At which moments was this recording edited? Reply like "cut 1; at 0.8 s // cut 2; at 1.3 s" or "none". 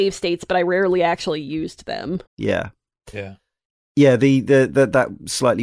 cut 1; at 2.3 s